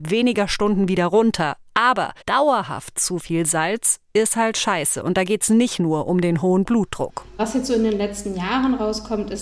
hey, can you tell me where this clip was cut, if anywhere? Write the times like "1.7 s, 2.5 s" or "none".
2.2 s